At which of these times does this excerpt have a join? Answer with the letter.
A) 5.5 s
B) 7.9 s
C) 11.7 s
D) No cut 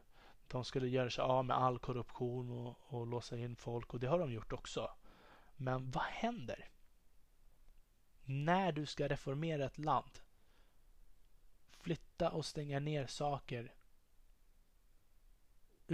D